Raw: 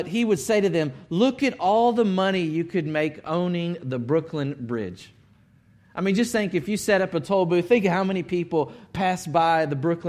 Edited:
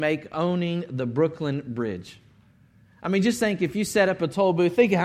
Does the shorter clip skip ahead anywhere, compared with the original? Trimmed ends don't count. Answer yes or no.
no